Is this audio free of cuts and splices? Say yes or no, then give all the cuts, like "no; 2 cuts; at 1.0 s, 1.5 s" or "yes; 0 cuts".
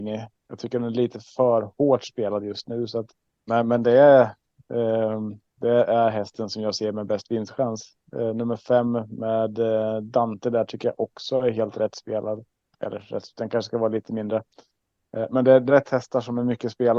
no; 1 cut; at 15.7 s